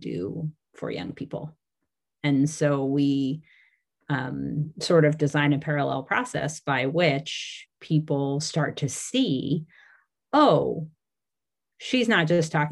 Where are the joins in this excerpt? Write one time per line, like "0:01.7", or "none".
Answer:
none